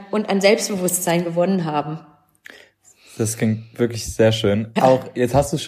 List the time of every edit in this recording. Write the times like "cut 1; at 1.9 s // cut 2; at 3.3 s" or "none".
cut 1; at 4.8 s